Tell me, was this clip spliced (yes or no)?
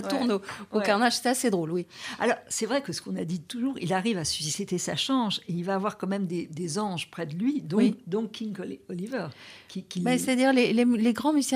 no